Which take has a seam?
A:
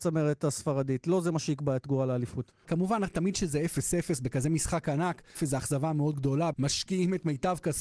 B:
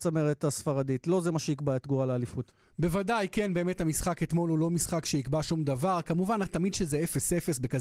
A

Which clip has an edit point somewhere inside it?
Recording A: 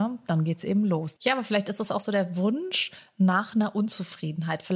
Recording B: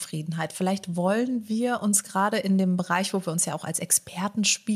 A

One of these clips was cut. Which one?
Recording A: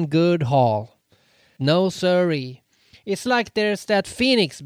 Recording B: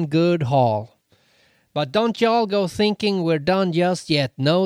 A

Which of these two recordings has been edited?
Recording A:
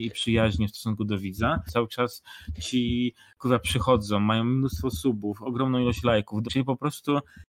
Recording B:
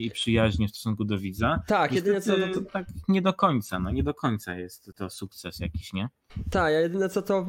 A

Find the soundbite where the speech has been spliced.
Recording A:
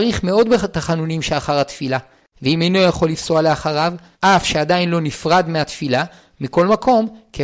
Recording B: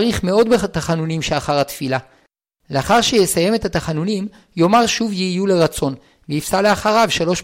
A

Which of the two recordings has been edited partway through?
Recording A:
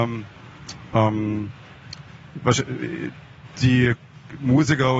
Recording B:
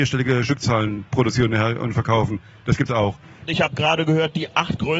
B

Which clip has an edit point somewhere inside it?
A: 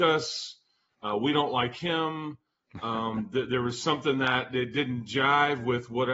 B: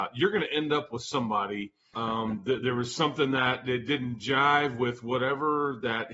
B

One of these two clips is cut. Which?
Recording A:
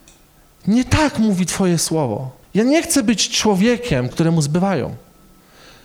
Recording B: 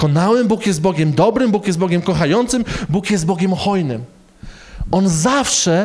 A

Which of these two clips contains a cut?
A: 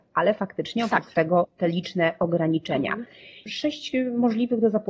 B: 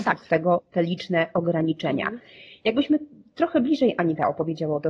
A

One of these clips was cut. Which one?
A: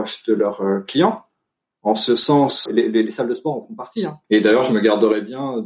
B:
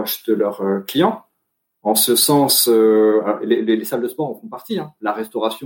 A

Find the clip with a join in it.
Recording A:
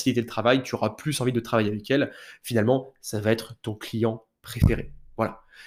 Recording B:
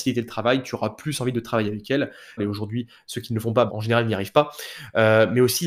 B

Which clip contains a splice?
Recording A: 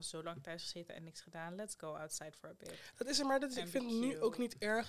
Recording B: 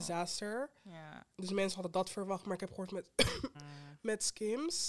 B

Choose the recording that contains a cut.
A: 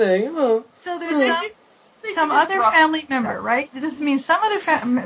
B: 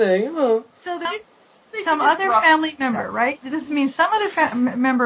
B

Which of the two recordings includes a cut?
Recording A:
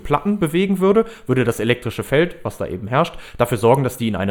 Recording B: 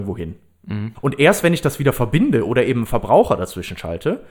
B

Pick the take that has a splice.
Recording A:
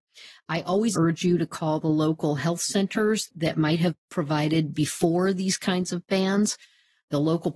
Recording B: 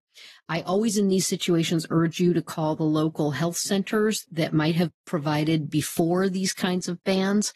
A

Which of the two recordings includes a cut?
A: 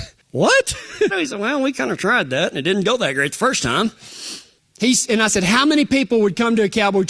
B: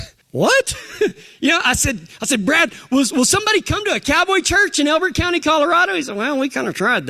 A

